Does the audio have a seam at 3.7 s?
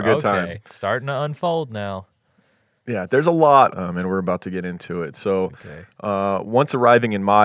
yes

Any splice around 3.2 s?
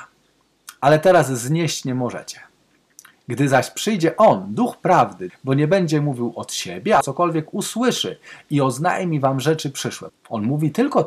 no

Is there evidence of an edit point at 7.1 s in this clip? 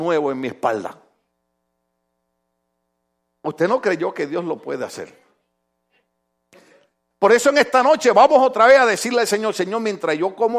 yes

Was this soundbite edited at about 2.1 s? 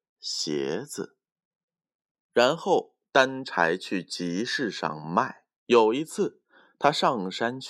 yes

